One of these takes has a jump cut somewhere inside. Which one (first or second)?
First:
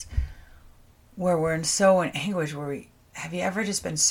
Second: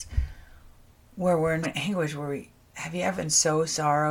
second